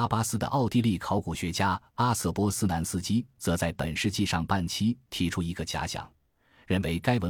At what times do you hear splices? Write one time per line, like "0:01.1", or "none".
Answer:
none